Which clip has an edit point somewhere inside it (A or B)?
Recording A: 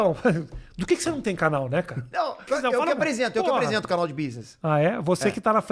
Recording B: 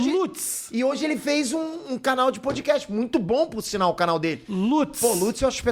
A